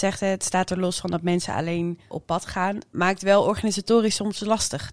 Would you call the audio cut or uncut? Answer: cut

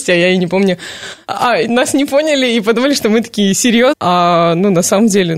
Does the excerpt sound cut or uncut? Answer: cut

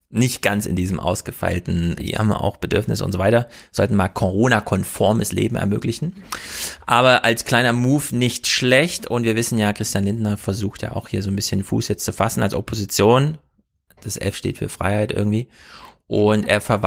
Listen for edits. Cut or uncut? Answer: cut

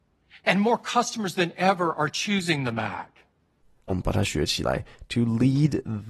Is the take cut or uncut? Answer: cut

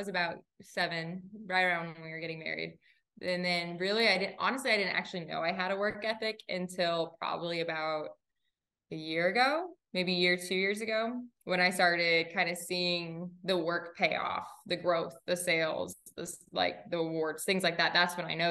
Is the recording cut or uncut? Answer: uncut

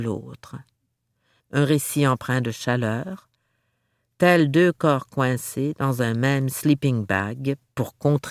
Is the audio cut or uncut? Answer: cut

